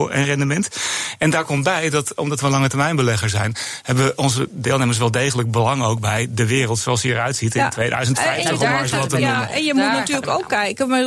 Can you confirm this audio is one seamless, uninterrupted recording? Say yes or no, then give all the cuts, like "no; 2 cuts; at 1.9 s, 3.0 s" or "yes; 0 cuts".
yes; 0 cuts